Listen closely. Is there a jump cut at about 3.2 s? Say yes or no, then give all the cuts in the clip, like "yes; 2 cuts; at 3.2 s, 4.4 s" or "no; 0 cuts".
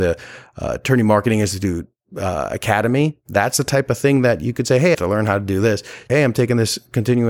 no; 2 cuts; at 4.9 s, 6.1 s